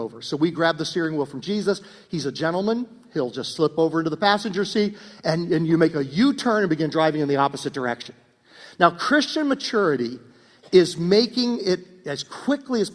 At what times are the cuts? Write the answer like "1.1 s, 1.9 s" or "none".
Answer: none

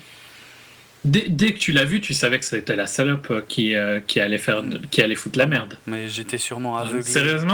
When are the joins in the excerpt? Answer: none

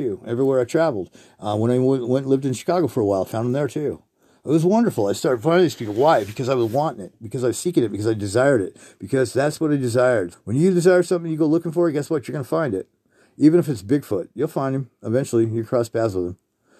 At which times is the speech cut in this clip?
10.3 s

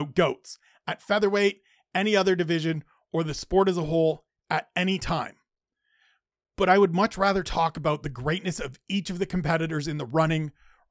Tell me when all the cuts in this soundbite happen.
none

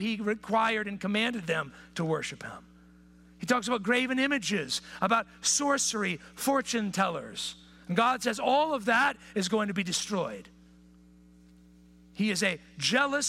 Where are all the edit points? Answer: none

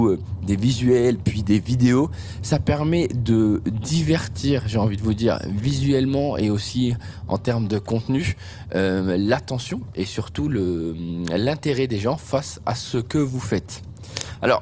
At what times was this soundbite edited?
none

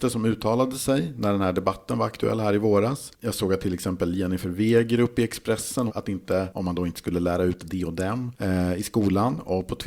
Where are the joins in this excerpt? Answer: 5.9 s

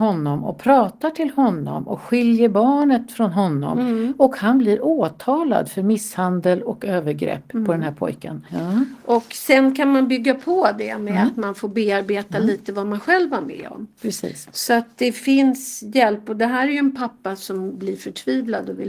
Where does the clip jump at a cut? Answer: 8.5 s

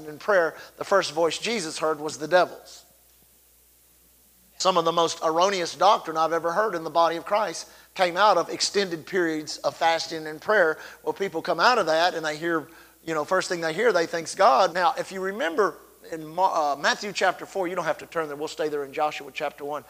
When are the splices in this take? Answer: 14.7 s

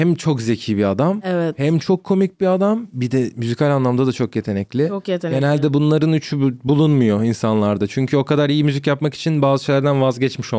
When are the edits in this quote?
none

